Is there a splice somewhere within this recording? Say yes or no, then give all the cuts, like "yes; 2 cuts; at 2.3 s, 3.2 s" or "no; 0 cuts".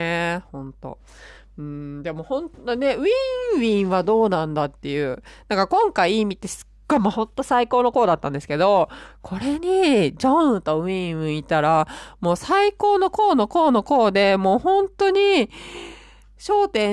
no; 0 cuts